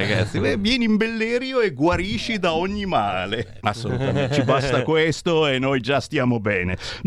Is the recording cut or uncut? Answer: cut